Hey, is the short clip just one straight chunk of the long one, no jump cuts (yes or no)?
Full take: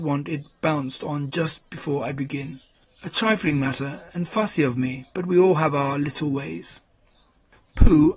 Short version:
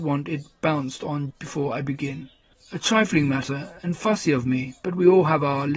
no